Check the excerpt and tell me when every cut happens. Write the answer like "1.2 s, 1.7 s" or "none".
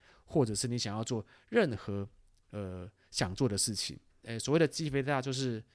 4.1 s